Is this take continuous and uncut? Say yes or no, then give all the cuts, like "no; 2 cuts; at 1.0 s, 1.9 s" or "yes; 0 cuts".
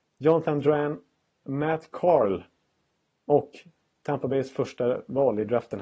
yes; 0 cuts